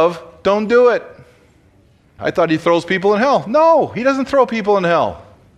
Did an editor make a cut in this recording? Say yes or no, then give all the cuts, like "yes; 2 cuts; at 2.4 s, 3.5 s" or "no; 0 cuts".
yes; 1 cut; at 2.2 s